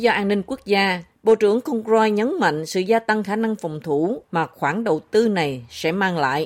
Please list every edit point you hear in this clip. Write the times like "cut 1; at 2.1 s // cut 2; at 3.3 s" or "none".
cut 1; at 1.1 s